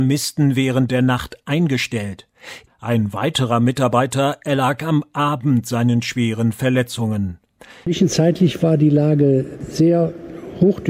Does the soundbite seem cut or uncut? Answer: cut